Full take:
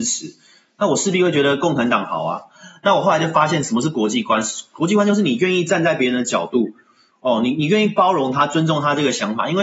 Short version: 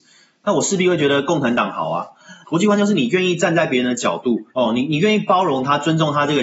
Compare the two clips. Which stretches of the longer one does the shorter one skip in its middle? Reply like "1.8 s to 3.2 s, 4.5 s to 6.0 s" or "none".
2.8 s to 4.7 s, 6.8 s to 7.2 s